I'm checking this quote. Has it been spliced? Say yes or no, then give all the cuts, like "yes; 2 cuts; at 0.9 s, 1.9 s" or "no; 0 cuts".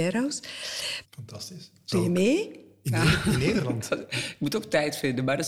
yes; 1 cut; at 1.0 s